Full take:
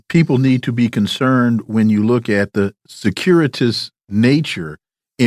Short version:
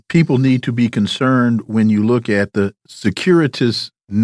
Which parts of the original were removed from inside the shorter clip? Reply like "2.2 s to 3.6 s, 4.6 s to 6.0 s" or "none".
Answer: none